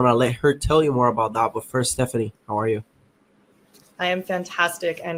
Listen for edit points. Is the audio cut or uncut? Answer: uncut